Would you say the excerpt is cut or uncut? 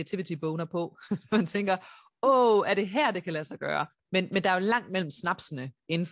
cut